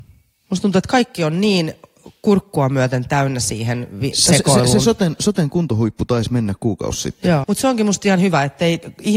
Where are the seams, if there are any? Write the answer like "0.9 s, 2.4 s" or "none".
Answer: 4.3 s, 7.4 s